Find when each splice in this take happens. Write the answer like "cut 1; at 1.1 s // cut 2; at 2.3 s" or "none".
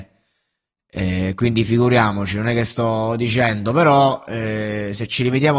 none